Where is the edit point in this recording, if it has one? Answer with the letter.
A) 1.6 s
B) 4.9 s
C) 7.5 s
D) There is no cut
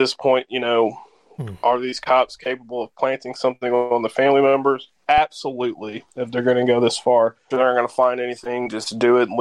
C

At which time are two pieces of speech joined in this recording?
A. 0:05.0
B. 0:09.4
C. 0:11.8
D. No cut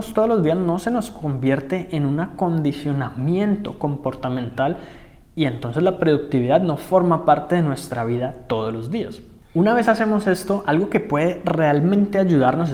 D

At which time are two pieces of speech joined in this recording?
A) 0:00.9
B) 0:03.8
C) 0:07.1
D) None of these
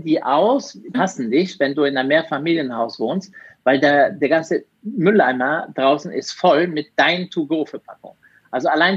A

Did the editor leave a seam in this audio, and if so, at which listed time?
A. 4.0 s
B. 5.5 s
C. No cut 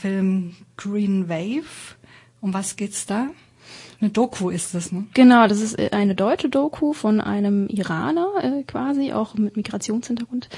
C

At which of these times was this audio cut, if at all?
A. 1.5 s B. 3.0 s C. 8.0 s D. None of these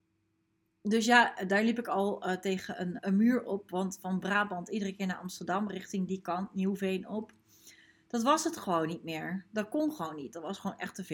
B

